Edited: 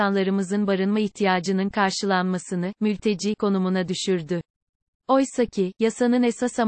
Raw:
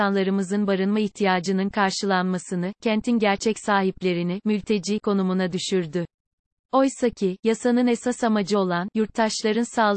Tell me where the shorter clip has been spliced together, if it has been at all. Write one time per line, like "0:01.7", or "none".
0:02.8